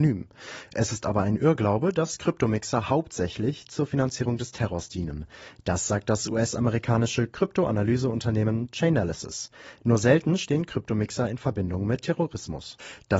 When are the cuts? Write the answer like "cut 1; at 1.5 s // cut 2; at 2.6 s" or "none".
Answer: none